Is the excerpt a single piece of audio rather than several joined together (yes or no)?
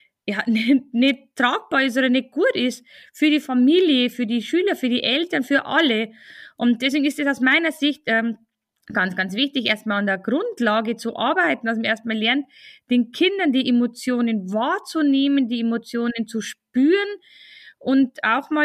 yes